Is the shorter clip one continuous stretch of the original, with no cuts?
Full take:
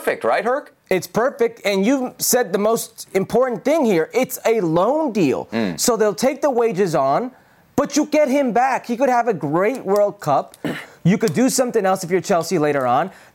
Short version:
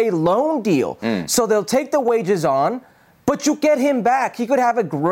yes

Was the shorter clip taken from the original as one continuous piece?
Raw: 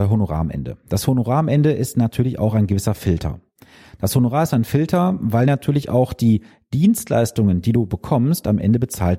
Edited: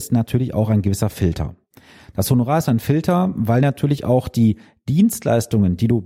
yes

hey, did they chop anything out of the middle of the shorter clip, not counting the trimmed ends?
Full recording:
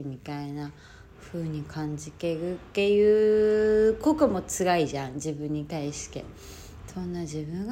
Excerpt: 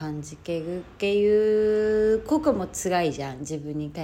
no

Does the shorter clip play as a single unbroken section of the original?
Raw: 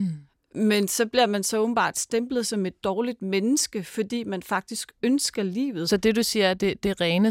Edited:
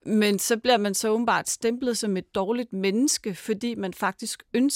yes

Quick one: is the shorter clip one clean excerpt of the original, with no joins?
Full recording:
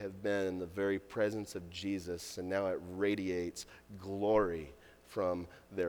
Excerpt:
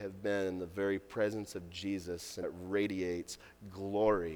no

